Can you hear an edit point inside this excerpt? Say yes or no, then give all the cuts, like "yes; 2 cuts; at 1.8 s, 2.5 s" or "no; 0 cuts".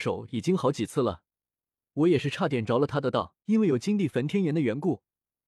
yes; 1 cut; at 3.4 s